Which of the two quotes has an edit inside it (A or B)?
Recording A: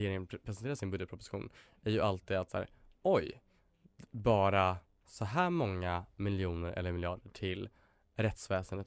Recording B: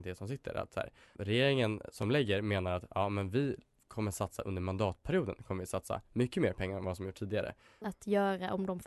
B